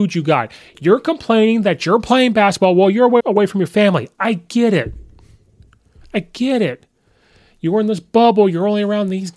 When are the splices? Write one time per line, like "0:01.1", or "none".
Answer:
0:03.2